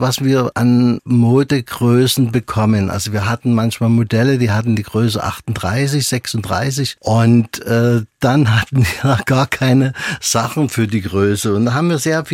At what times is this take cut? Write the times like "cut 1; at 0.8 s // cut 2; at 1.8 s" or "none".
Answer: none